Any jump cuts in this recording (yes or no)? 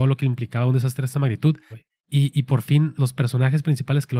yes